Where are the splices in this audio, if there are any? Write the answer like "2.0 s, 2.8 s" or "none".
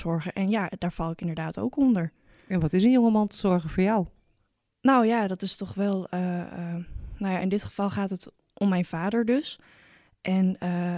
none

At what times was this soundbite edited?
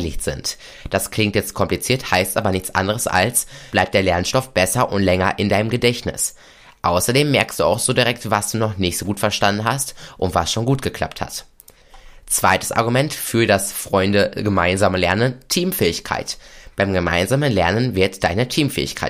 3.7 s

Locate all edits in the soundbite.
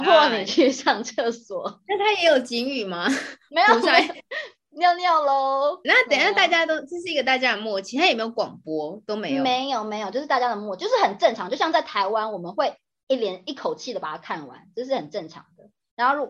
5.8 s

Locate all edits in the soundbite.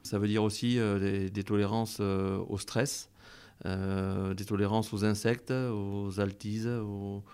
none

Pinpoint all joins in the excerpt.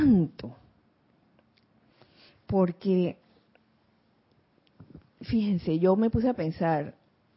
2.3 s

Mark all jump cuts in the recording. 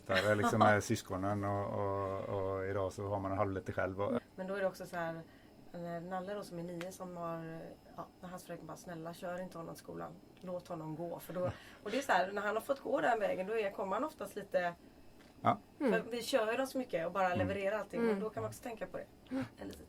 4.2 s

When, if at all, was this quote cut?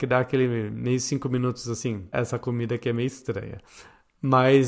2.1 s

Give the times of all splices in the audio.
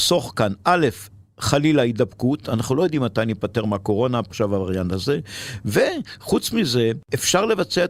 4.3 s

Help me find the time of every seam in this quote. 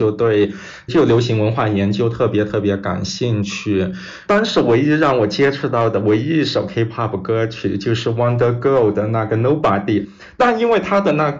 4.2 s

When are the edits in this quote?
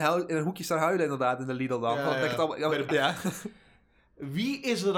2.9 s

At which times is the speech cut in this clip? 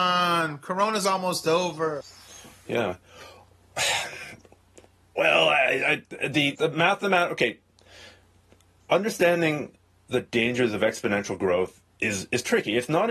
6.5 s

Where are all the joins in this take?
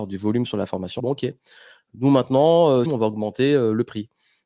1.0 s, 2.9 s

